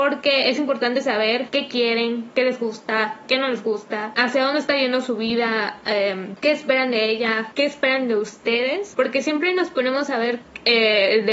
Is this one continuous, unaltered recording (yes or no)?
no